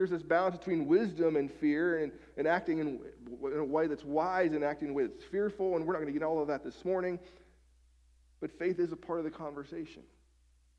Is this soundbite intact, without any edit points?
yes; 0 cuts

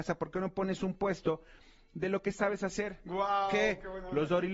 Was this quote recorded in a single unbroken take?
yes; 0 cuts

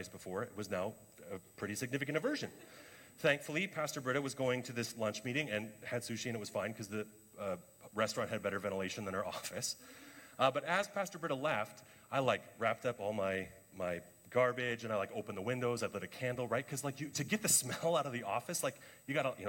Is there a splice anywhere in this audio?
no; 0 cuts

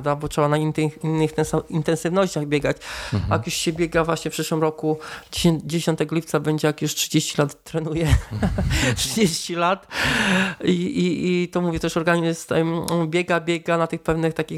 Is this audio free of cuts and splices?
yes; 0 cuts

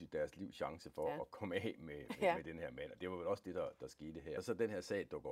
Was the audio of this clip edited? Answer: no; 0 cuts

